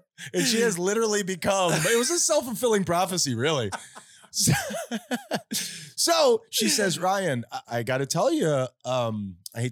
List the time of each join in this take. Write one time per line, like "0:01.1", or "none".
0:07.6